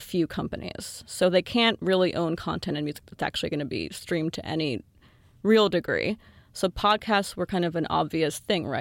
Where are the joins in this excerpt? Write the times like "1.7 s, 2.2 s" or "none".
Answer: none